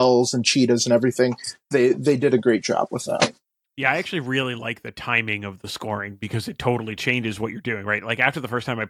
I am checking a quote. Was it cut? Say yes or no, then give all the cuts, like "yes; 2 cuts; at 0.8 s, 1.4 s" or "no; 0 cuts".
no; 0 cuts